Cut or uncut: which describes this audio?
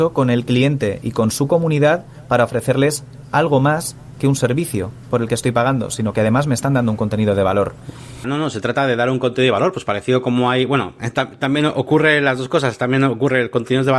cut